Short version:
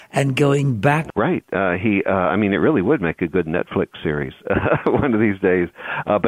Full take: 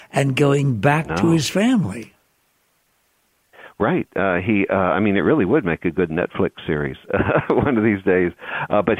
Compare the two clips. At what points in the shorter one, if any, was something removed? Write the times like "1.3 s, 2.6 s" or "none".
1.1 s